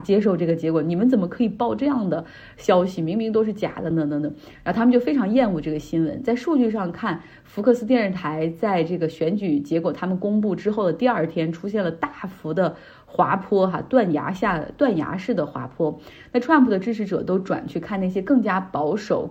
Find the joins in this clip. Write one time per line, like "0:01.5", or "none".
0:03.9

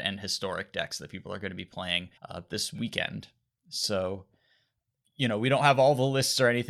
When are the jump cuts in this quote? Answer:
0:02.2

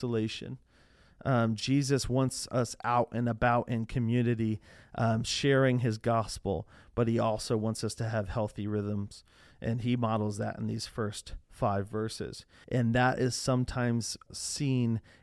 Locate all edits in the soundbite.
0:12.6
0:14.3

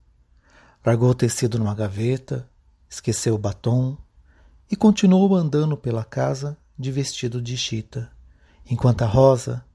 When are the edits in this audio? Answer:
none

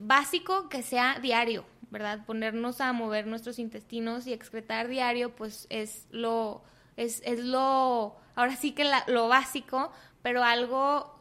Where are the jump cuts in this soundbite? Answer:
none

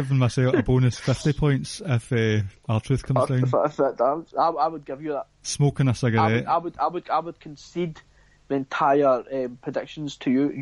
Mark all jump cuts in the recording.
none

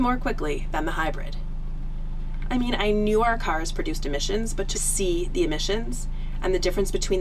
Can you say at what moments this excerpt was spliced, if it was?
0:02.4
0:04.7

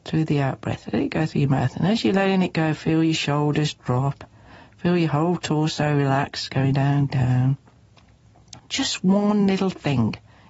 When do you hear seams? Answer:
0:06.7
0:08.6

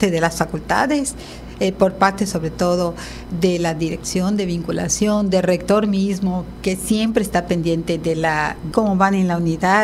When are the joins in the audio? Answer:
0:06.6
0:08.7

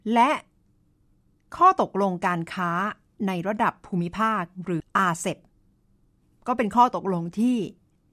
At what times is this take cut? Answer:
0:04.8

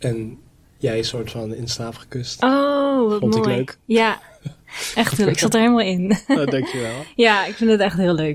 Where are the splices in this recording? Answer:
0:04.9

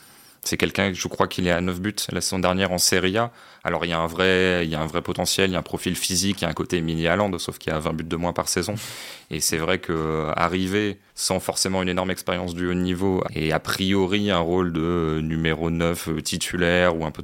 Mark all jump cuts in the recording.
0:11.1
0:13.2

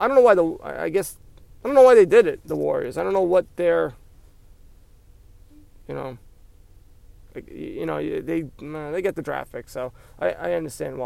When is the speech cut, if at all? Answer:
none

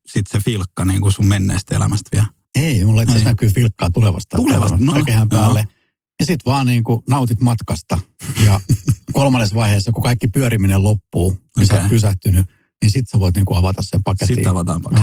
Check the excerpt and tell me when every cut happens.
0:04.9

